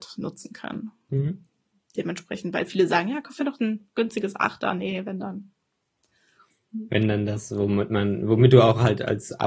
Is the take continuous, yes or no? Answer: yes